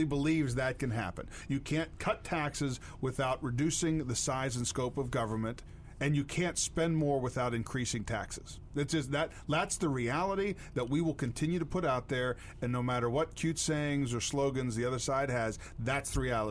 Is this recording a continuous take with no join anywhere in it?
yes; 0 cuts

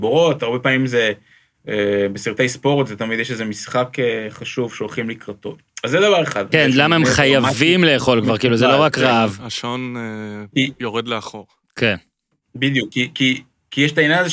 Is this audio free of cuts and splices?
no; 1 cut; at 6.5 s

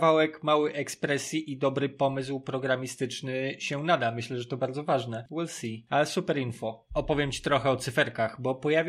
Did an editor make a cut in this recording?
yes; 2 cuts; at 5.3 s, 6.9 s

